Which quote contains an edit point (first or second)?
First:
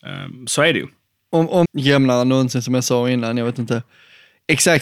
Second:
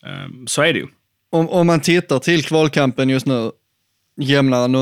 first